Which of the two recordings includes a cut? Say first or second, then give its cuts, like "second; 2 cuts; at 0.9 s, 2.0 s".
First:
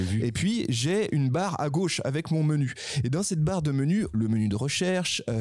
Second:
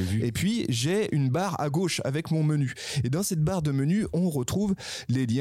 first; 1 cut; at 4.1 s